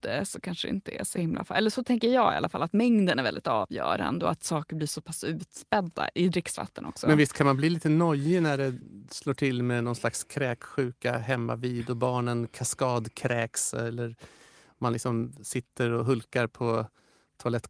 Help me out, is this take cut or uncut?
uncut